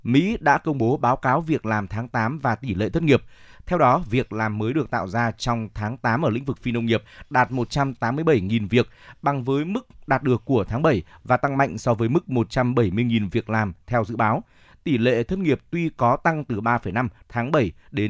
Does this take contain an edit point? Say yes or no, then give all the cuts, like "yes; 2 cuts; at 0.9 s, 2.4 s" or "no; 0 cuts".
no; 0 cuts